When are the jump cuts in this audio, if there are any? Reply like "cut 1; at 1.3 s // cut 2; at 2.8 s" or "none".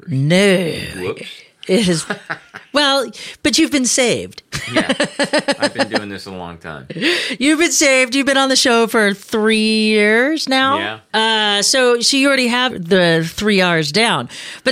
cut 1; at 11.1 s // cut 2; at 12.7 s